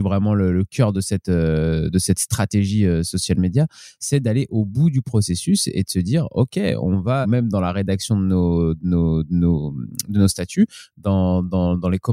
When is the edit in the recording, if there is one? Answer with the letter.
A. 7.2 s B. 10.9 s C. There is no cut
A